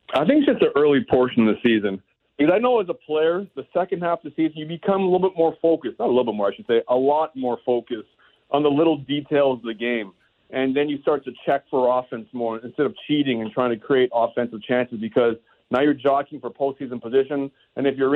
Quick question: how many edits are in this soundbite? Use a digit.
0